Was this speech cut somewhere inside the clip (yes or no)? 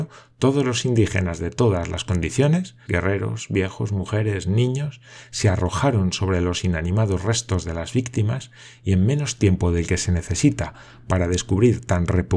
yes